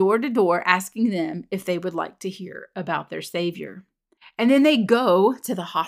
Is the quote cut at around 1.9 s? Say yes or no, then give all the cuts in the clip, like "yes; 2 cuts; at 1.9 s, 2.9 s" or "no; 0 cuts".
no; 0 cuts